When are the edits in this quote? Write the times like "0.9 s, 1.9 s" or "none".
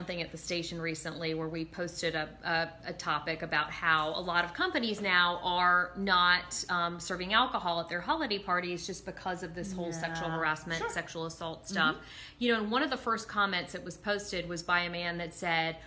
none